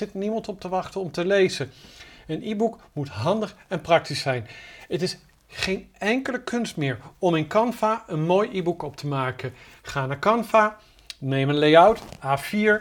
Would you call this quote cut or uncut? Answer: uncut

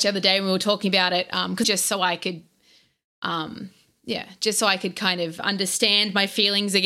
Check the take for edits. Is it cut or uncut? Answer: cut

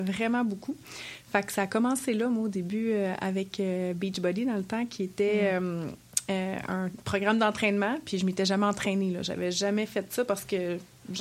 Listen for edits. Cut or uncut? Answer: uncut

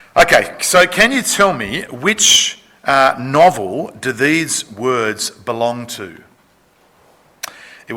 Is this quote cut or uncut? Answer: uncut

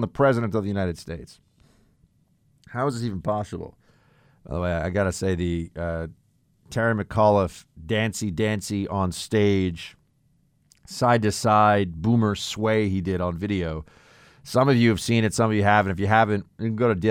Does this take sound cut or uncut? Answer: uncut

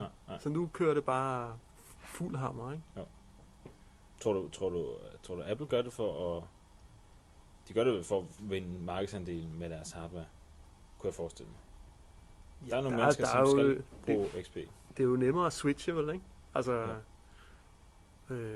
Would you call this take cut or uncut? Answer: uncut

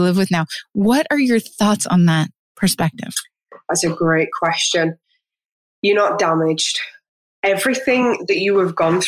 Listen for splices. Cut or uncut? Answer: uncut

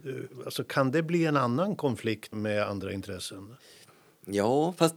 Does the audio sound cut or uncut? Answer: cut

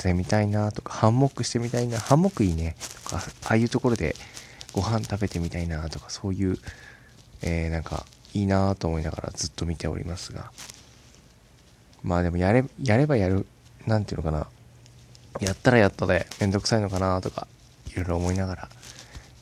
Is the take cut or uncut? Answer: uncut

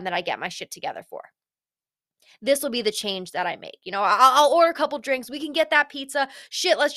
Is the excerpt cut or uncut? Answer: uncut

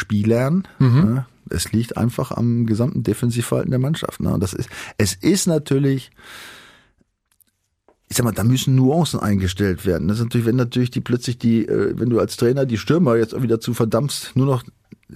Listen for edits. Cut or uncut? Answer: uncut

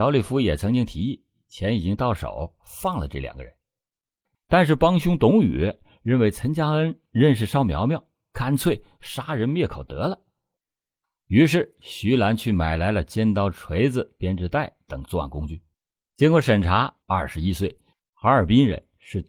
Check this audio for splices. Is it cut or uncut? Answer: cut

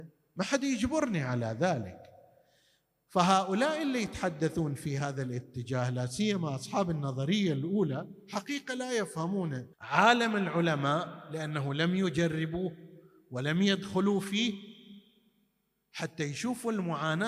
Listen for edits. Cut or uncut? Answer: cut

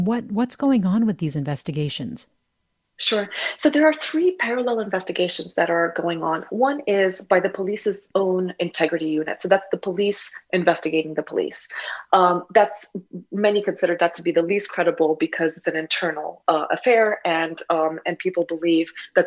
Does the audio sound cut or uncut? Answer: uncut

